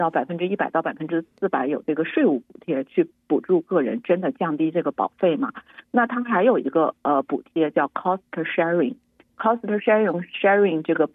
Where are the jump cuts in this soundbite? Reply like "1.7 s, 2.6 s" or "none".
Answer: none